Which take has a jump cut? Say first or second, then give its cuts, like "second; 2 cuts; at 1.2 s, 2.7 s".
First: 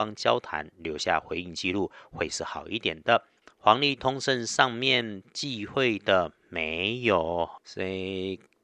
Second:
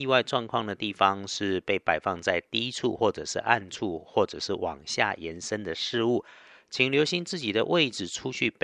first; 2 cuts; at 3.4 s, 7.6 s